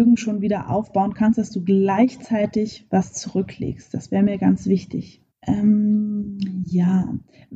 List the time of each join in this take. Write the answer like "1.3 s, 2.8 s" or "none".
5.3 s